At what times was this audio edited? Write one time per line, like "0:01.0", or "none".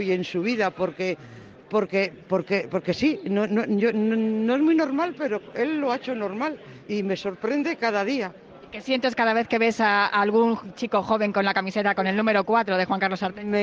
none